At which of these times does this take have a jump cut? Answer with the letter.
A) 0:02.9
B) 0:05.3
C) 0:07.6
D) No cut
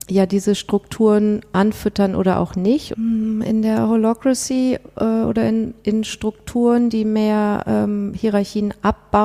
A